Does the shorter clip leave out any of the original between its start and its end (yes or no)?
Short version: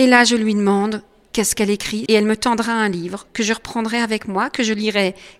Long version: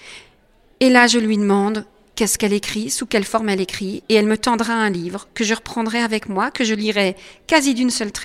yes